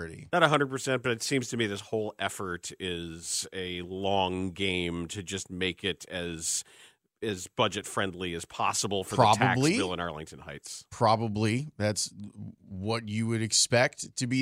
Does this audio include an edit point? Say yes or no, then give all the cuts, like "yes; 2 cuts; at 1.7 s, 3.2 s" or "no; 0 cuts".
no; 0 cuts